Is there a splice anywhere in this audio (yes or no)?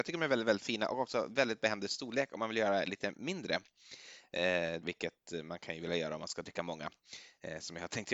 yes